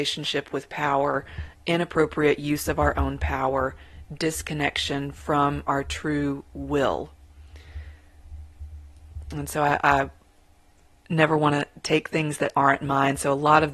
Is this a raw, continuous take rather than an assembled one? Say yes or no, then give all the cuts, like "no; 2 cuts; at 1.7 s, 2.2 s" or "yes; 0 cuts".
yes; 0 cuts